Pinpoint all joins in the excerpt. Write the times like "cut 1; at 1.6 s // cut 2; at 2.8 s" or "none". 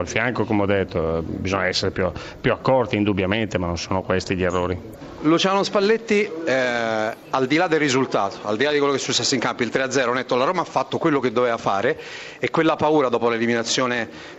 none